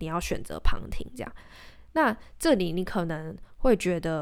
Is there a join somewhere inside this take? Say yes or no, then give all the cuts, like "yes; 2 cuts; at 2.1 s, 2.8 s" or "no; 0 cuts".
no; 0 cuts